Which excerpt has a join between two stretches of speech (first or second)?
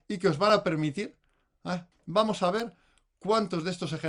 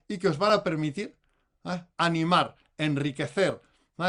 first